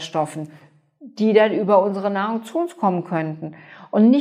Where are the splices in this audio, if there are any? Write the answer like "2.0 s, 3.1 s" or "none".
none